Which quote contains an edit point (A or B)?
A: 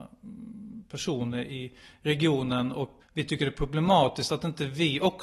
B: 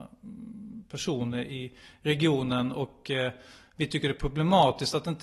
A